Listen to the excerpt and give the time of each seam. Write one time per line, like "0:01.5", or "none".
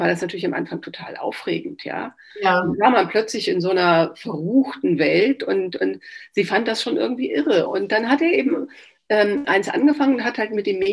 0:02.3
0:07.7